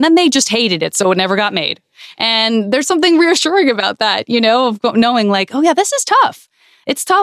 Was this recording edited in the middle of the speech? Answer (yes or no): no